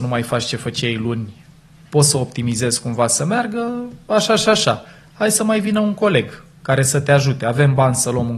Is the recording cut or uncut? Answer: uncut